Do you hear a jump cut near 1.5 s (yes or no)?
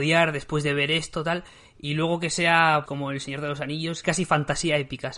no